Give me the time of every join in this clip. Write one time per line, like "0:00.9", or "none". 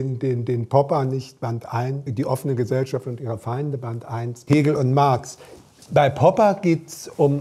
0:02.1
0:04.5